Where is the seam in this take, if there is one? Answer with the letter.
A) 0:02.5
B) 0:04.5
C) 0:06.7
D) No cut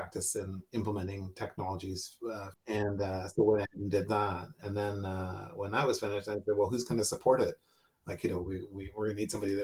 A